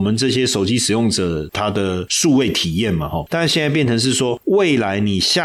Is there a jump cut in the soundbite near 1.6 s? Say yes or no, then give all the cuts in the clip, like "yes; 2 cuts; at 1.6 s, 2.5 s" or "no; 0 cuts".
no; 1 cut; at 3.3 s